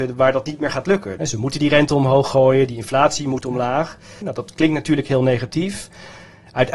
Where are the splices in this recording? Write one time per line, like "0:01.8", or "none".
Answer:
0:01.2
0:04.2